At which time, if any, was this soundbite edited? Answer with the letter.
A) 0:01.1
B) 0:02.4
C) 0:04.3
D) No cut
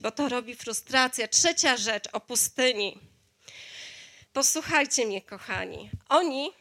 C